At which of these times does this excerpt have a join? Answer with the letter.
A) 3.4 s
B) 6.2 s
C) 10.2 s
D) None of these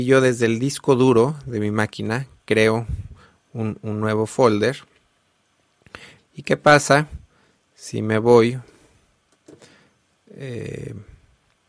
B